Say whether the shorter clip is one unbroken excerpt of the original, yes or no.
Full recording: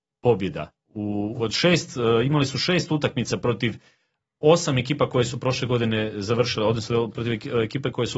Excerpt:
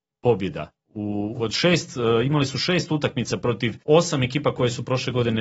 no